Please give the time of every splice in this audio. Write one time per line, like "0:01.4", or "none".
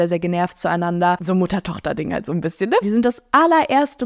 0:02.8

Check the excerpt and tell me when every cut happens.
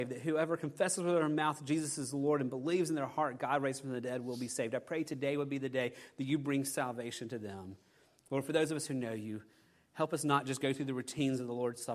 none

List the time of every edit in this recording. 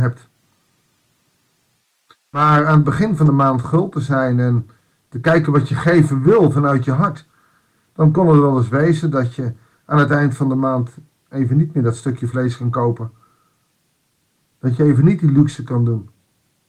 none

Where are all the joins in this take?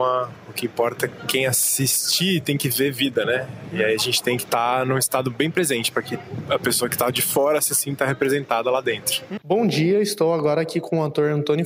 none

